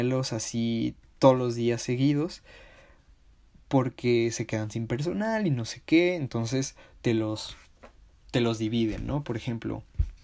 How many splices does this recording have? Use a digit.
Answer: 0